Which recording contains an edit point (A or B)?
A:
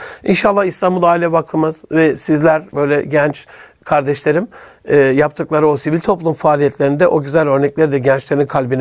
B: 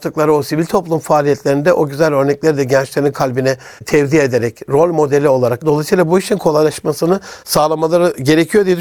B